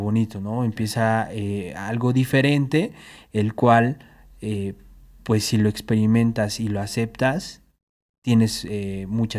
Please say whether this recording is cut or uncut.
uncut